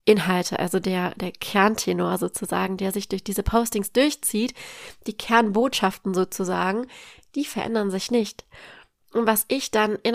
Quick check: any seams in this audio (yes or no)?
no